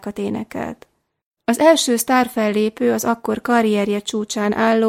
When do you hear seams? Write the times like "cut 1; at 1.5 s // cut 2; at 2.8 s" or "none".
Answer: cut 1; at 1.4 s